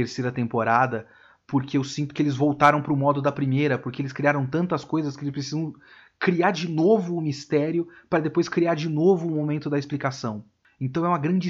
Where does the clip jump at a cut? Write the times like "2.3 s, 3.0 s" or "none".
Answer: none

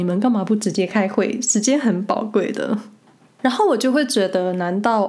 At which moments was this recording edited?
none

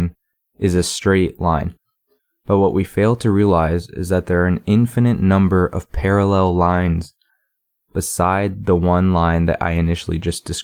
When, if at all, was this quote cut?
none

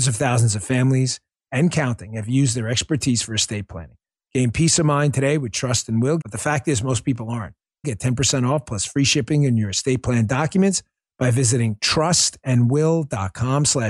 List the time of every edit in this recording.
6.2 s, 7.8 s

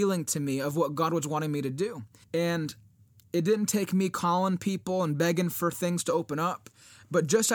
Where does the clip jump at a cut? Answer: 2.2 s

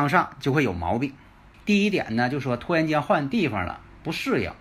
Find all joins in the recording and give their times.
1.5 s

